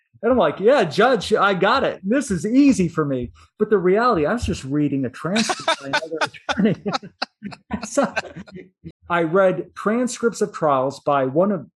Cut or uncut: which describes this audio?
cut